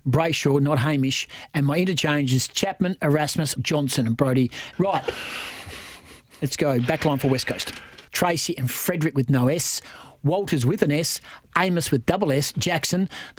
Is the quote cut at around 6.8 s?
no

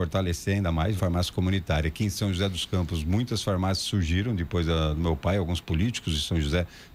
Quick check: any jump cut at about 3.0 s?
no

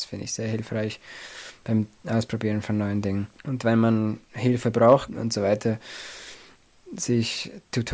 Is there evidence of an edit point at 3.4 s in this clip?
yes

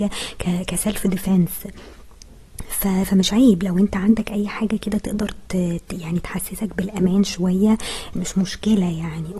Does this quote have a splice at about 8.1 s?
yes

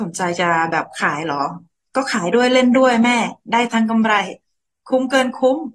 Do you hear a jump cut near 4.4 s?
no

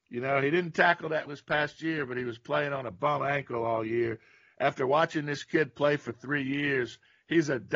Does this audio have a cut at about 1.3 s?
yes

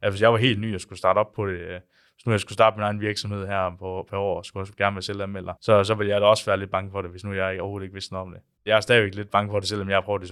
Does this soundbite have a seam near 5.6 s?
yes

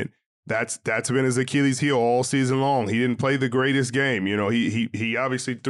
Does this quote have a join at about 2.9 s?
no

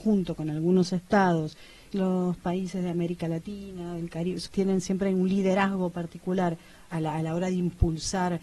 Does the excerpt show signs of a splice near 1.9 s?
yes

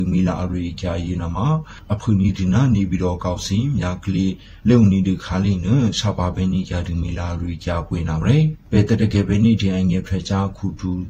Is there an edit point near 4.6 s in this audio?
yes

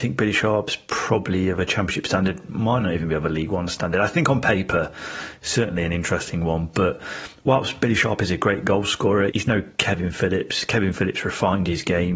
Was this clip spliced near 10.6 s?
no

